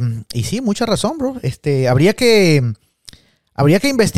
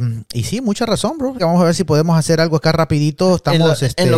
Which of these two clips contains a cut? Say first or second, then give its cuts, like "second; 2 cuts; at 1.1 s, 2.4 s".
second; 1 cut; at 1.4 s